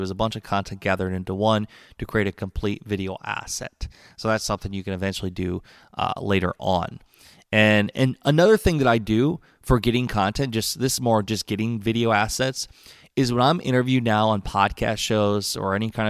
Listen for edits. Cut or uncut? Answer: uncut